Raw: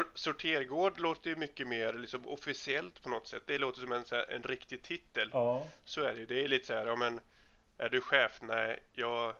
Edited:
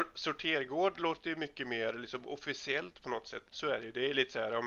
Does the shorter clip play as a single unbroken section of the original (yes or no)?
no